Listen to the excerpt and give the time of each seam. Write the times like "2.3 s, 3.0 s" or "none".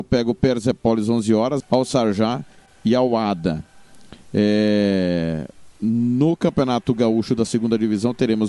1.6 s